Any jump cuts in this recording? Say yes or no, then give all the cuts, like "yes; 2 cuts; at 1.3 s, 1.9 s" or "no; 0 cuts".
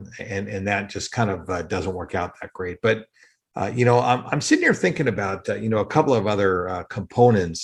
no; 0 cuts